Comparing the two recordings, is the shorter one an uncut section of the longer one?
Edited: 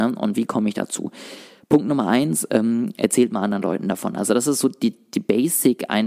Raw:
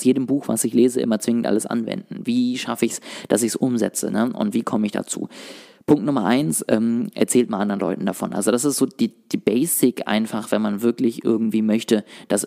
yes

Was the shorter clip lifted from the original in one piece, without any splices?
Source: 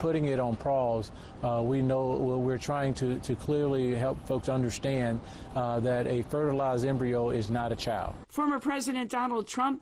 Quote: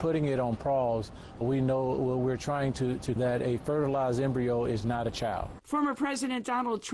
no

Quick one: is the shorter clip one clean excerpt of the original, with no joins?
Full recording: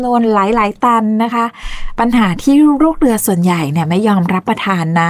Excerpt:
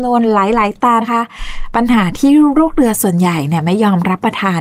no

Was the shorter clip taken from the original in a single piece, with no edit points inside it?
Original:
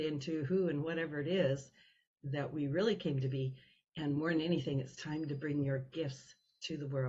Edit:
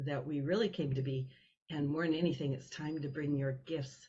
yes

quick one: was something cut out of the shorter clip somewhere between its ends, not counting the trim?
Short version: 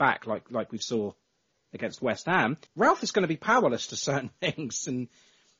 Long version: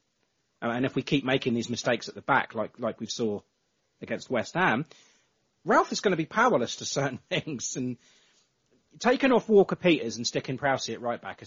yes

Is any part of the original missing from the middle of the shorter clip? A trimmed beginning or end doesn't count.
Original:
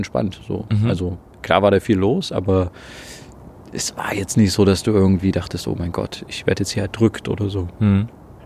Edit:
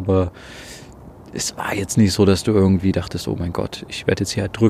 no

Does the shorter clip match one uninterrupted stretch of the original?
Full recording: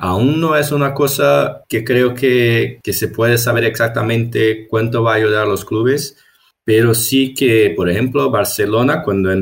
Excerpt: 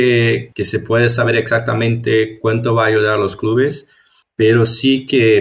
yes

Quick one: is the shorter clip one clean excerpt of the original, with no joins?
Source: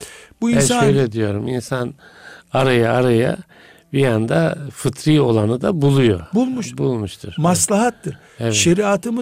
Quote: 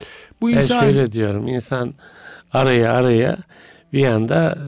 yes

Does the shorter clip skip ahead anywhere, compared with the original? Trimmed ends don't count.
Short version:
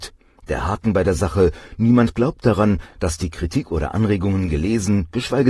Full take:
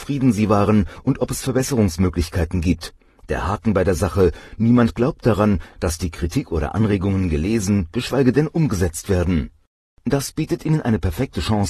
no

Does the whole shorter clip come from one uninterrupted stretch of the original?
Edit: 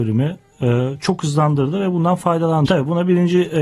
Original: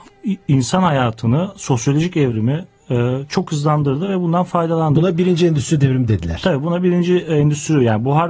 no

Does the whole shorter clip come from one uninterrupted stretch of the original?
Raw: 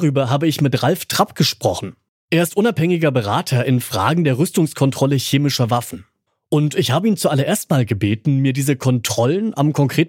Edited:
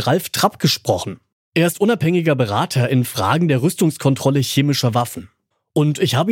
yes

